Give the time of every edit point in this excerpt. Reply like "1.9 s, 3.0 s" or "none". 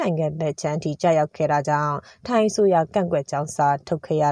2.9 s

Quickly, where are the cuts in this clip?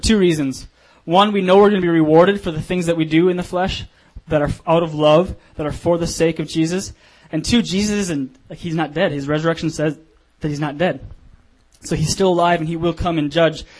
none

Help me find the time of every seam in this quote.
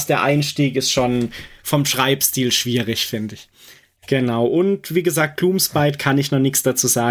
none

